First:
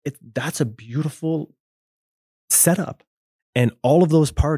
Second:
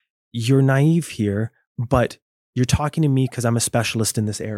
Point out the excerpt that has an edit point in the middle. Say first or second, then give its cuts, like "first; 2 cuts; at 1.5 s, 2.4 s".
first; 1 cut; at 3.4 s